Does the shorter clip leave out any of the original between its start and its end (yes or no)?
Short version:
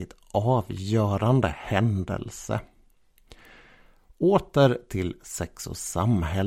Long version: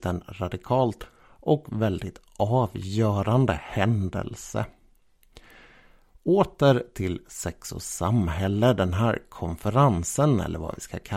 no